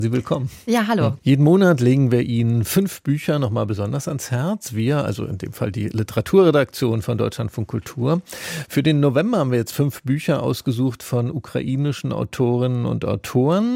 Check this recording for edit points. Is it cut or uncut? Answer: cut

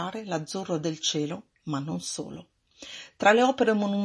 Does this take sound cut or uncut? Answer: uncut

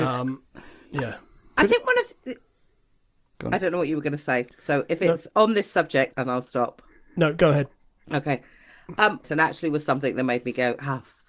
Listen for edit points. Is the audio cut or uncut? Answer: cut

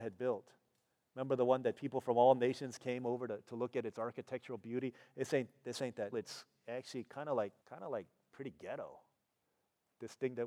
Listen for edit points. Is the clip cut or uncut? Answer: cut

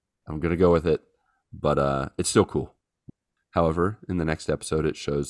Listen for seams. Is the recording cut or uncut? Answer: cut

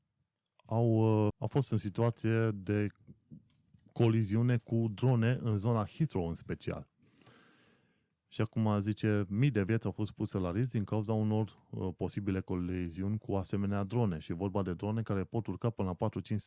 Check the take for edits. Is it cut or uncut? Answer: cut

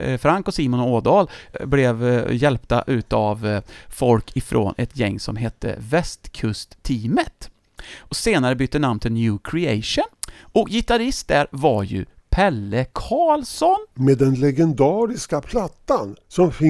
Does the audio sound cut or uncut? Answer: uncut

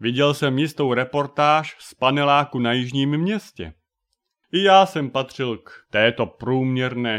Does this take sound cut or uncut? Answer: cut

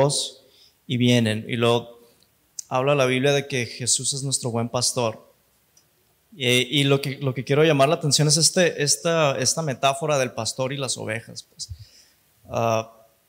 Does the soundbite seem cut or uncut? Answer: uncut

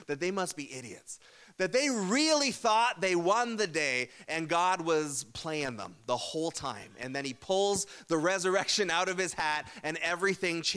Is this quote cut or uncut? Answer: uncut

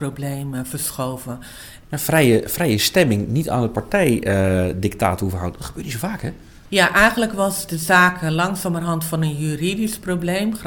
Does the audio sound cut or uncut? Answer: cut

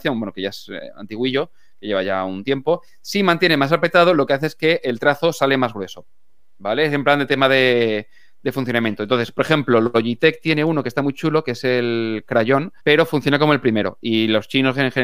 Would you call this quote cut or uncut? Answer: cut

